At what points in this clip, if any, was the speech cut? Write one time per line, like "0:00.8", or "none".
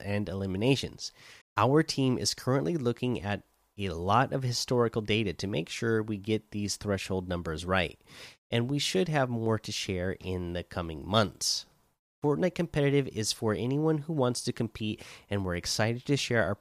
0:01.4
0:12.1